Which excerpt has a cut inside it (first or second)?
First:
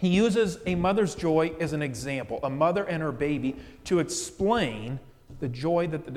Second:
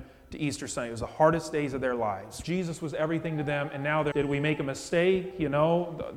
second